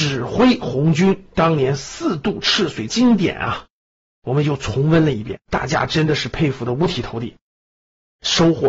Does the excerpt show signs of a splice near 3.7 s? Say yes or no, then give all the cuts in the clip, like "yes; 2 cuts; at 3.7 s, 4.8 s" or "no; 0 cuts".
no; 1 cut; at 5.4 s